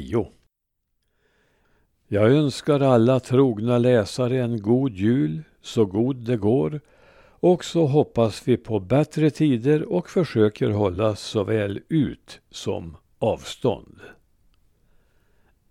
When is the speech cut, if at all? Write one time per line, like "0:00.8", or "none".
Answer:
none